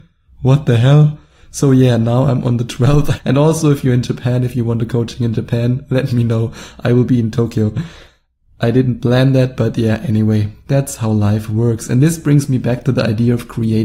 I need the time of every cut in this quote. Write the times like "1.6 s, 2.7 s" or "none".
3.2 s